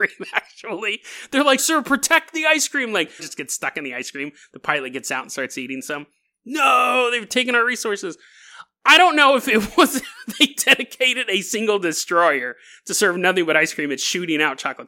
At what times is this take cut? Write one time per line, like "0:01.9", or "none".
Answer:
0:01.6
0:03.2